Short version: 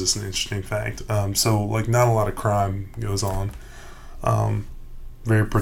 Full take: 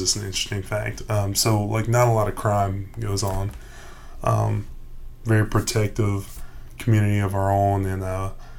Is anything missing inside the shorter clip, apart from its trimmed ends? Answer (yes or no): no